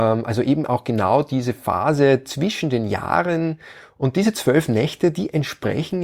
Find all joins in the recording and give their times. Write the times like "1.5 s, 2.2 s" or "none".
none